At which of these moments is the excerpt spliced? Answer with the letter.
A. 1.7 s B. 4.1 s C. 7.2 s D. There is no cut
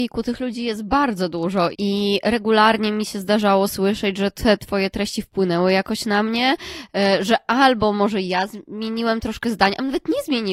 A